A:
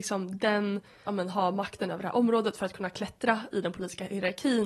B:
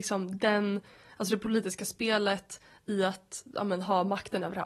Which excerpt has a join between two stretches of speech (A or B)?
A